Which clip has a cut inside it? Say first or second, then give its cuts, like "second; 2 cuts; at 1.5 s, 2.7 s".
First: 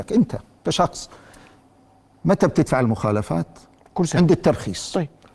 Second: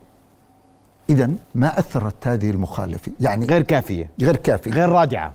second; 2 cuts; at 1.4 s, 3.2 s